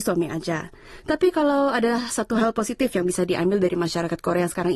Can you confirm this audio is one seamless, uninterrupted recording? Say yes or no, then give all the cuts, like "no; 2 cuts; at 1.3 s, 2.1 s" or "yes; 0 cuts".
yes; 0 cuts